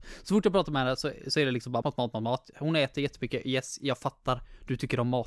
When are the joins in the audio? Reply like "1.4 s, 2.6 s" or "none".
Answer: 1.8 s